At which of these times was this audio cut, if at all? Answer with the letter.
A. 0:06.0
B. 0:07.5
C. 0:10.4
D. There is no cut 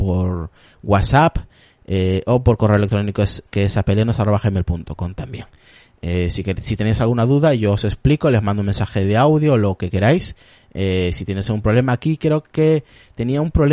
D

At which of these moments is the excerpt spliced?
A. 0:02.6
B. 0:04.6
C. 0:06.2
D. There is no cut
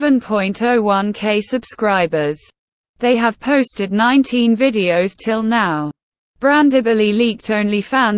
D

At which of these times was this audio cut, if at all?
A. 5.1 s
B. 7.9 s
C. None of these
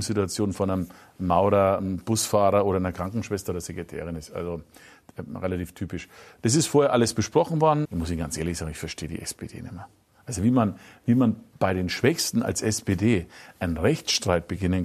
B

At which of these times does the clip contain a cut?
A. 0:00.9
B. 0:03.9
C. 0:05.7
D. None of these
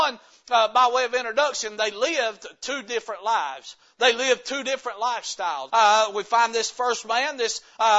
C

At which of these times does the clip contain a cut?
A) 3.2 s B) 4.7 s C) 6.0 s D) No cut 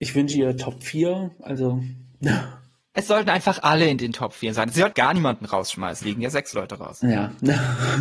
C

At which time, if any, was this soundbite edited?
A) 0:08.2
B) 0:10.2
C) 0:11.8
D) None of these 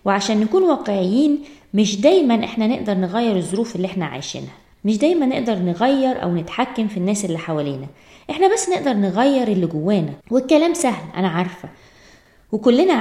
B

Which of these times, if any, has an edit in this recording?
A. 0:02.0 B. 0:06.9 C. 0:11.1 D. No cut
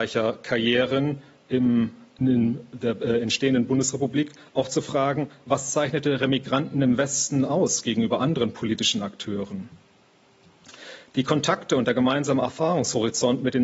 D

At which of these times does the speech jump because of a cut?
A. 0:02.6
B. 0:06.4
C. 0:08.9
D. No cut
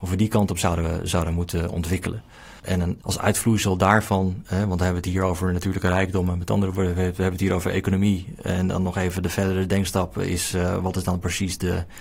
A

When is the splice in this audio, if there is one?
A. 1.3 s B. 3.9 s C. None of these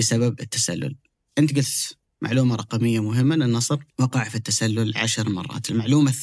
B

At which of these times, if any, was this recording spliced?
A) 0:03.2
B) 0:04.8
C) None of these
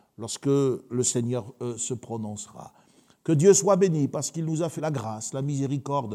B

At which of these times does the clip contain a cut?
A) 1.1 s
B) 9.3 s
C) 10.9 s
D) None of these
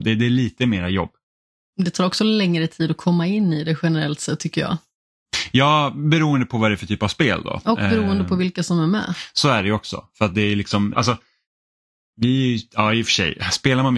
C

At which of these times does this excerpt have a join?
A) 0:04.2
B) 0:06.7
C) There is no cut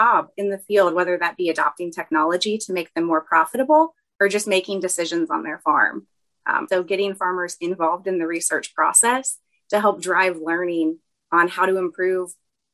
B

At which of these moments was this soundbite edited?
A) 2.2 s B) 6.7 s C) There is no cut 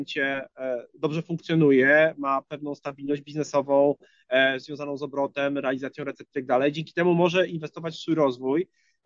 C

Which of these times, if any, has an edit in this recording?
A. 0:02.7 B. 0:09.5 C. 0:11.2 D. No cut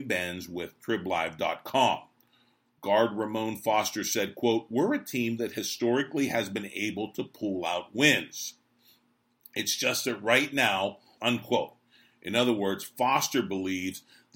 C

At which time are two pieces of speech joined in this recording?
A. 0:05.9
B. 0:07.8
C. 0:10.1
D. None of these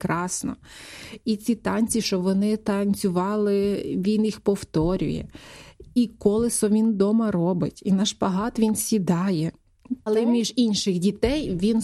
C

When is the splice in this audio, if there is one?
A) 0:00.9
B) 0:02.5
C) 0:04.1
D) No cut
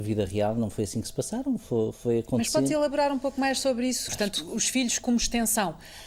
C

